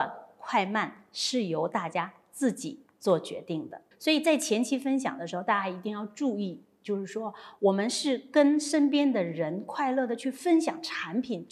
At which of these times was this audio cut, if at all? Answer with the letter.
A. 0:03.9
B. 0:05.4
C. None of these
A